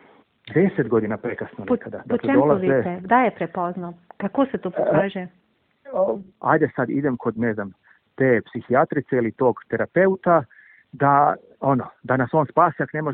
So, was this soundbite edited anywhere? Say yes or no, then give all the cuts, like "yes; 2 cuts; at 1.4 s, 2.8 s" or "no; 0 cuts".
yes; 1 cut; at 6.3 s